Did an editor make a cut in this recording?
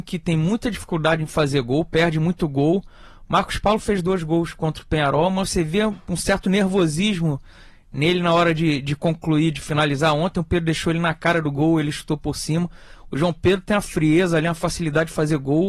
no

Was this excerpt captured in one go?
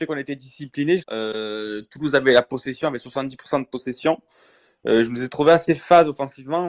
no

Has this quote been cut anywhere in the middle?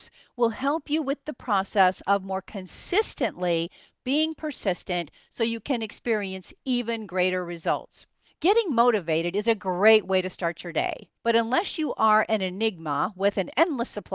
yes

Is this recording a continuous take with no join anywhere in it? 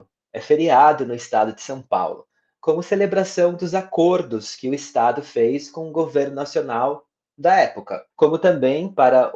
no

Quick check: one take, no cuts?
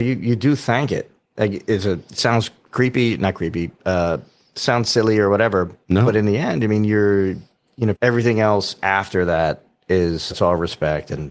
no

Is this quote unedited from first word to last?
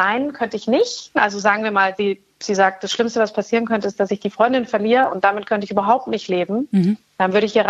yes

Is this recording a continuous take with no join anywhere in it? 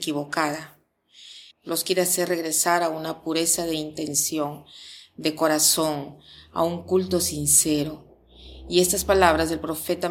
no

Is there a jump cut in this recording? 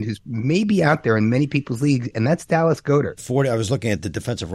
yes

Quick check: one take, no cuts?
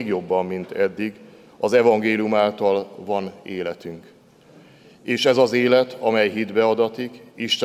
yes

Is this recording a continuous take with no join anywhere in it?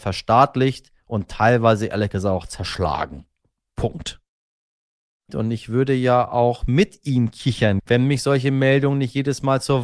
no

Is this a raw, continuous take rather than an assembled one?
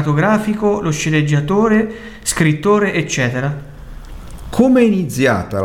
yes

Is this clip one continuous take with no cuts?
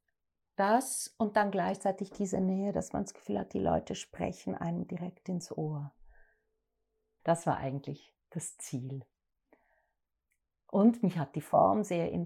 no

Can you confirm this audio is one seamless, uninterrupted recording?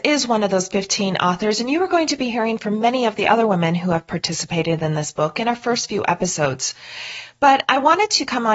yes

